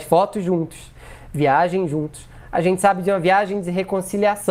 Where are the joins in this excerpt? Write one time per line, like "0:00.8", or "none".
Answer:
none